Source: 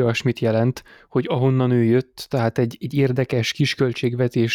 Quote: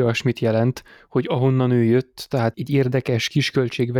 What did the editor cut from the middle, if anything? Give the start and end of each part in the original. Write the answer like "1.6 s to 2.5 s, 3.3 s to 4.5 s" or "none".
2.5 s to 2.8 s